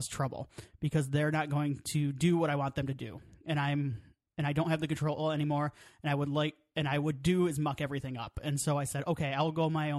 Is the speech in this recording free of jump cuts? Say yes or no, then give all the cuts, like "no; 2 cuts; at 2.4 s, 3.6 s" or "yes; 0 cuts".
yes; 0 cuts